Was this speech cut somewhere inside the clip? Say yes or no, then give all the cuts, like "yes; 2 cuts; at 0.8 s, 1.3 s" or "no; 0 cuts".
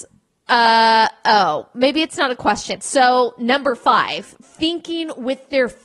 yes; 2 cuts; at 2.8 s, 4.4 s